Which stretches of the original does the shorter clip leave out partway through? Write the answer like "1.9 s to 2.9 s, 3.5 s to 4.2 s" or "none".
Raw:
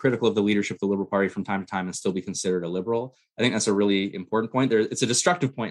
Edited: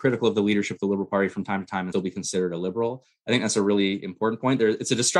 1.9 s to 2.0 s